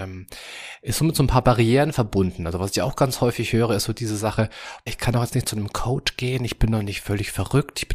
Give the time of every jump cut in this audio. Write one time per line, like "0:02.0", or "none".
0:04.9